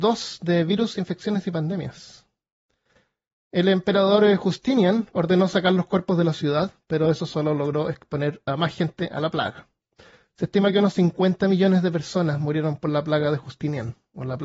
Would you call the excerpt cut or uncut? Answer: uncut